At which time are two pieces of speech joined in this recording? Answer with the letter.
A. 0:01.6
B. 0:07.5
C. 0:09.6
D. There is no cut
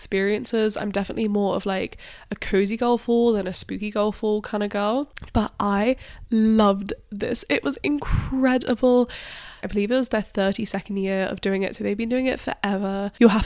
C